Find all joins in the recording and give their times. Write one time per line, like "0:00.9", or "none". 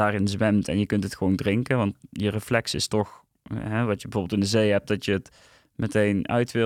none